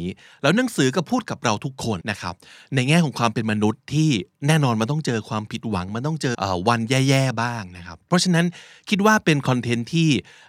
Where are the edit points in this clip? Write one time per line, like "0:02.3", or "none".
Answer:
0:02.0
0:06.3